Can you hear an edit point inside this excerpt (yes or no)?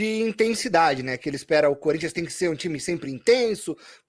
no